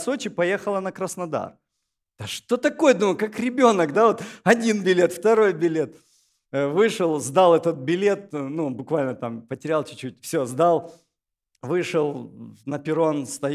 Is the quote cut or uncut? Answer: uncut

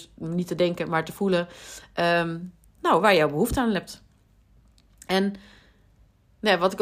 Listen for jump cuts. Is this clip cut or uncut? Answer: uncut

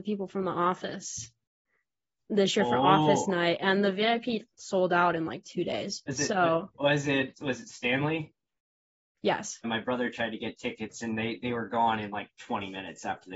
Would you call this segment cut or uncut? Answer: cut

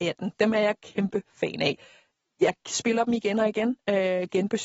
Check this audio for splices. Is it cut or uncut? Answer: uncut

